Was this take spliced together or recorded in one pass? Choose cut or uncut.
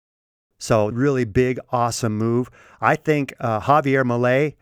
cut